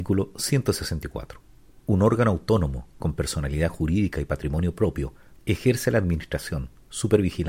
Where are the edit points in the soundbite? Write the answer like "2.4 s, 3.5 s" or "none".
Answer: 1.8 s, 5.4 s